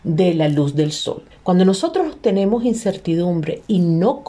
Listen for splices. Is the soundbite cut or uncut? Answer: cut